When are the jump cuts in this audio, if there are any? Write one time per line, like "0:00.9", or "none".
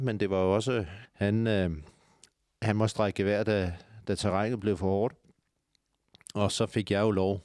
0:01.1